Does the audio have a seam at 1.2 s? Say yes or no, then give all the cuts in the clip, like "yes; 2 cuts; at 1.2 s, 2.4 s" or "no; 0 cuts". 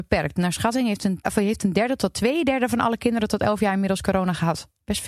yes; 1 cut; at 1.2 s